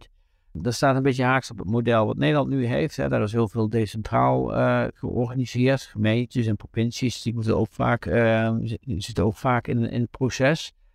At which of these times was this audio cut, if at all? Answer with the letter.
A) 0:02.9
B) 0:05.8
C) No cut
C